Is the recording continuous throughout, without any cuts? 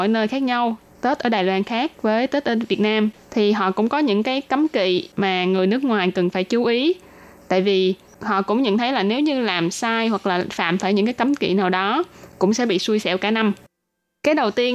yes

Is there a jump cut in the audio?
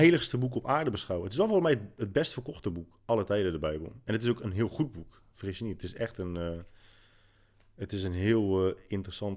no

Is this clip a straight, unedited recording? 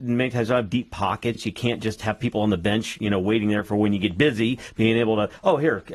yes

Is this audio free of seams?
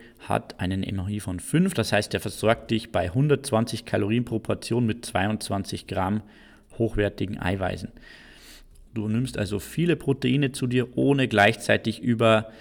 no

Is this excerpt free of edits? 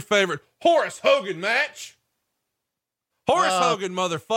no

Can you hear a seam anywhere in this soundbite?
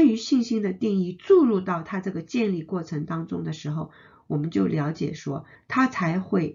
yes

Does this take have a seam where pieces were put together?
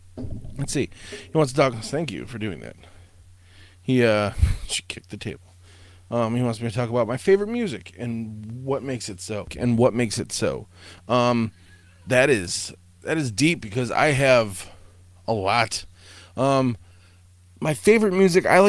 no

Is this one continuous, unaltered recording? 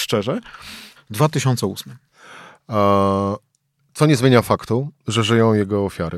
no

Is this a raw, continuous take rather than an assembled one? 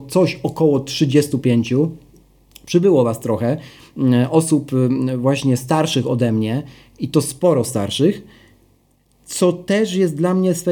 yes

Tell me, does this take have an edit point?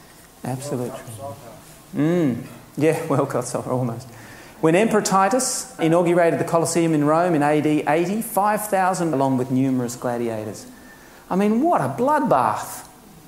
yes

